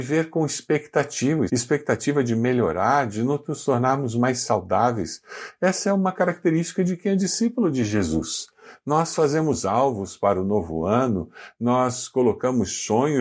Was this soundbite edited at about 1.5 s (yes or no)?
yes